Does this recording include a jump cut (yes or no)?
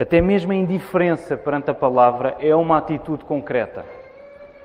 no